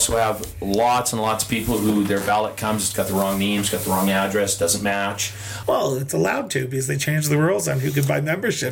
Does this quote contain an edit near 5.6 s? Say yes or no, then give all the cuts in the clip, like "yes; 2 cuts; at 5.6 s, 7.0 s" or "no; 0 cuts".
yes; 1 cut; at 5.6 s